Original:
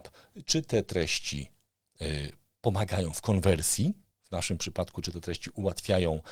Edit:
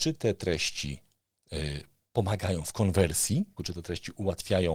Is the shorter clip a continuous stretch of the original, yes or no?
no